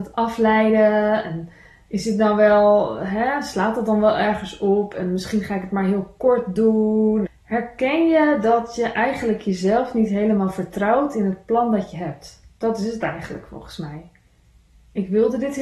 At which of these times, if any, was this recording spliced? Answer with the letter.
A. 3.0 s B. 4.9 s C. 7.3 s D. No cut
C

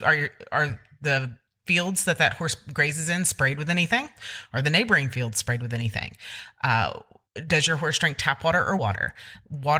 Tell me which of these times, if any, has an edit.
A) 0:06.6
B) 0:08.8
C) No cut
B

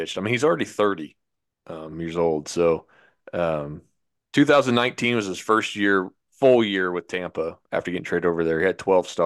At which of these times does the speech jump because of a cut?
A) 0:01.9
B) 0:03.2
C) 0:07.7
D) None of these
A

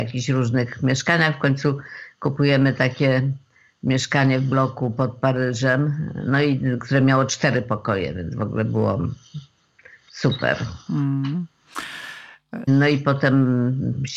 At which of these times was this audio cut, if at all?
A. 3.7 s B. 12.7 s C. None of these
B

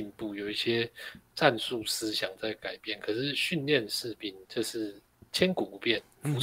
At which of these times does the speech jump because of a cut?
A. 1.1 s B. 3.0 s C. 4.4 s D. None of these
C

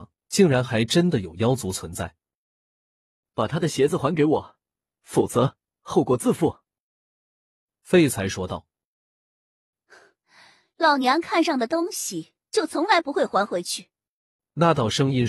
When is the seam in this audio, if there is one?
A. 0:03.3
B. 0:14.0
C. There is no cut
C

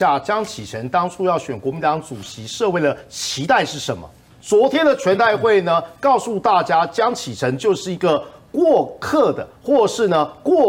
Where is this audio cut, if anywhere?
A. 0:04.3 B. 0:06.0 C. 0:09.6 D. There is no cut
A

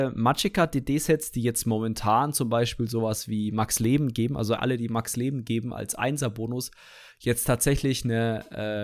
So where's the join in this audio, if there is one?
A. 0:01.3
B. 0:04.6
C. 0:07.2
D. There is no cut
B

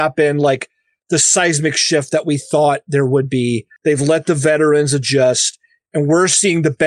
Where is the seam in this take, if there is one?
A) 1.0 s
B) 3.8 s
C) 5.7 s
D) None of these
B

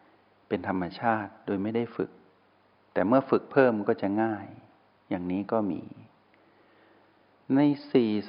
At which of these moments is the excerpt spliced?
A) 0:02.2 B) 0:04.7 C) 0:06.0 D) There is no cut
D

